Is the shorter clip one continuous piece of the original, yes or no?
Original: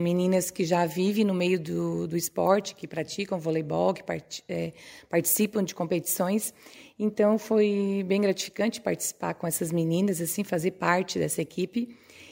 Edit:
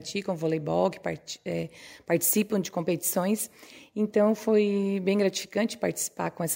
yes